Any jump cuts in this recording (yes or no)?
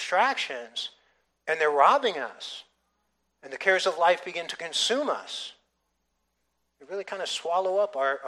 no